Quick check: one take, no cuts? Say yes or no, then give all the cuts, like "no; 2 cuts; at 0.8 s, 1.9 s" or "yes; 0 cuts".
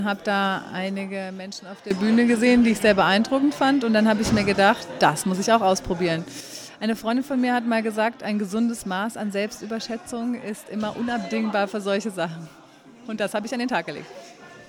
yes; 0 cuts